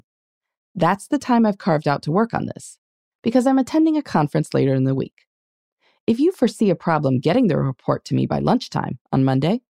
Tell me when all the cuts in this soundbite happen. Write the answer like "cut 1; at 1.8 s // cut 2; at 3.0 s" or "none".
none